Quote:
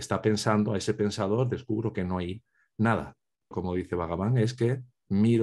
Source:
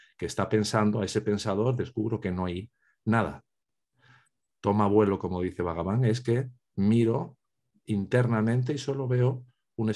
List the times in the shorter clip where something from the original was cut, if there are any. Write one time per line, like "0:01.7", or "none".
0:03.5